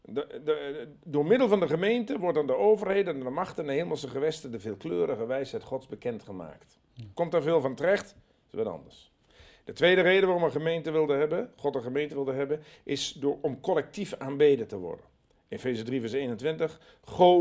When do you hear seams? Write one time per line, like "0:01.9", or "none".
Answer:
none